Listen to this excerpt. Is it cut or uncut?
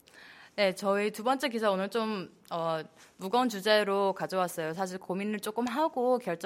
uncut